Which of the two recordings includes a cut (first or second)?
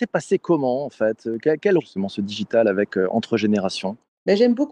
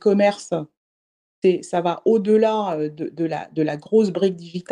first